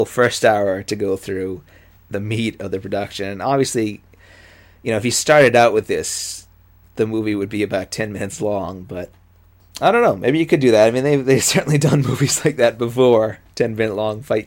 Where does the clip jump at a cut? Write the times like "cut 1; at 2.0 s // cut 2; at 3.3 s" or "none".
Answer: cut 1; at 2.0 s